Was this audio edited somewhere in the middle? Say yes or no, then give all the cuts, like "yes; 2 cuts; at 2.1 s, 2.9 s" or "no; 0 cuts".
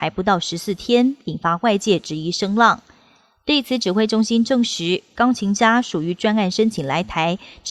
no; 0 cuts